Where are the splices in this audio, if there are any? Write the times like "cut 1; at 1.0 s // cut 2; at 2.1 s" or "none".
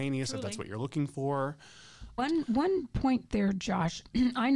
cut 1; at 2.2 s